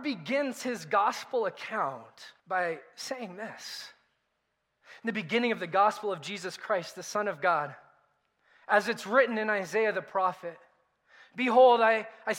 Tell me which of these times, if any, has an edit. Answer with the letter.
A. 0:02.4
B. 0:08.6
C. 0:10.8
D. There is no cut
A